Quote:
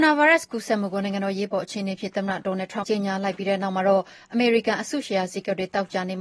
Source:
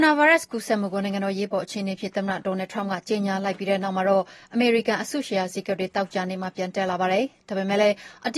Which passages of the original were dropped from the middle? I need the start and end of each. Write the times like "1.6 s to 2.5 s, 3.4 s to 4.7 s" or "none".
2.8 s to 3.0 s